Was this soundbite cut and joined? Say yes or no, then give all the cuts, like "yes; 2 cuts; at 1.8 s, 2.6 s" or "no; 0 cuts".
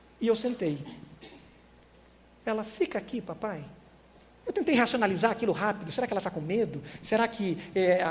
yes; 1 cut; at 4.3 s